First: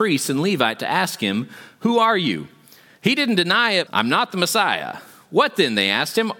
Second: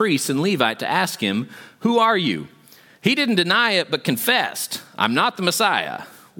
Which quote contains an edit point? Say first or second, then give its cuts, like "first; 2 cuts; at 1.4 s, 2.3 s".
first; 1 cut; at 3.9 s